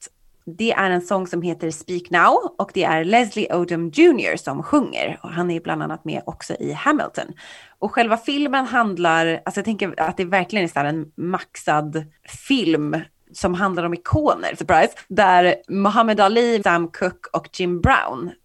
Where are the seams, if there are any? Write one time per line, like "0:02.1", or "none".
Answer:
0:14.6
0:16.6